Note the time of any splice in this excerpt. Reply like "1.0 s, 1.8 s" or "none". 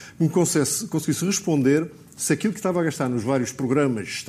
none